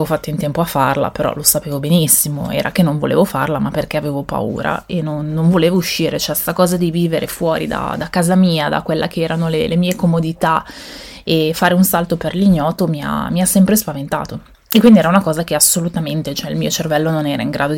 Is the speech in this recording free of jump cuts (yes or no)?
yes